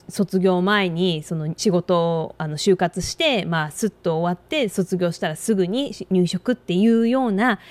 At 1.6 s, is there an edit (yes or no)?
yes